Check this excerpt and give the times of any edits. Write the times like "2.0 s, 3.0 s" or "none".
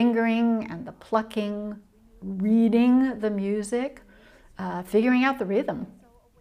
none